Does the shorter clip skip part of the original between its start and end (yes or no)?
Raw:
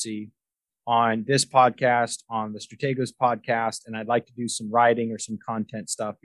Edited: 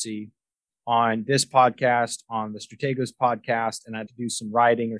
yes